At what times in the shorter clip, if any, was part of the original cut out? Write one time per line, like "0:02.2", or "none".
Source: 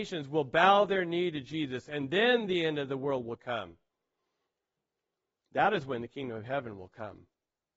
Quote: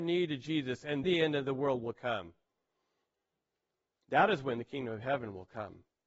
0:01.0